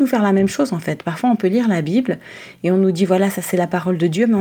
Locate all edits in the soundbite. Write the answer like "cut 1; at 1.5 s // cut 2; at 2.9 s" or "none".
none